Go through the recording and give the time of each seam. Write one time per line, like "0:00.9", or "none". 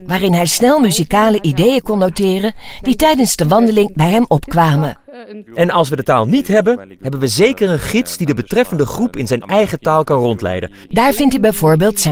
0:05.5
0:10.9

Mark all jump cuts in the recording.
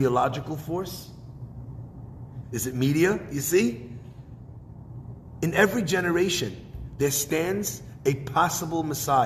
0:02.4

